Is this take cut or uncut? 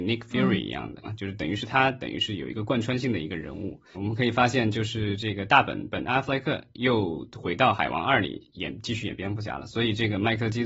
cut